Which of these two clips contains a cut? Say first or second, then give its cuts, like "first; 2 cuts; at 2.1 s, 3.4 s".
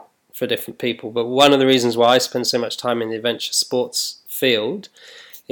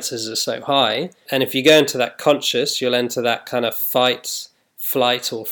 second; 1 cut; at 1.2 s